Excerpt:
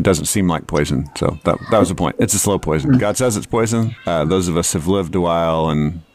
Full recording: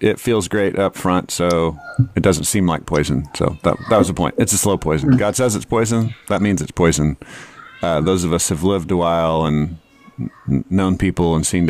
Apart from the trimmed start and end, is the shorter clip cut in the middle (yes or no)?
yes